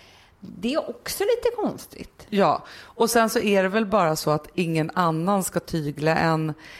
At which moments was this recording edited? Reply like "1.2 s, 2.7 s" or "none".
none